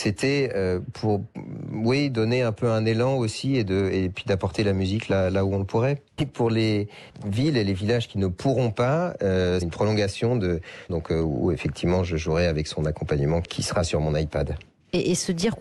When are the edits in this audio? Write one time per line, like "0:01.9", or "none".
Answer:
0:06.2
0:09.6
0:10.9